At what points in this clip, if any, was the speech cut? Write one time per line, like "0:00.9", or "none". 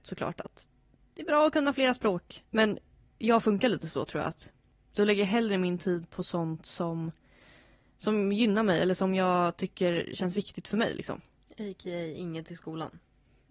0:02.5